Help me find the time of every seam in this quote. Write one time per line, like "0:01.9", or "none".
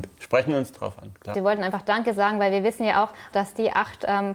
0:01.3
0:03.3